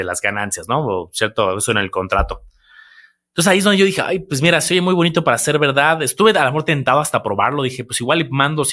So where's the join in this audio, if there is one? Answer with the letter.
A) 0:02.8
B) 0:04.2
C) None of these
C